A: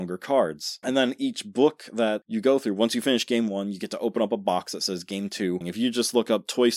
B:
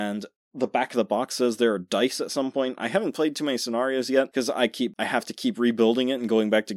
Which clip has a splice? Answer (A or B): A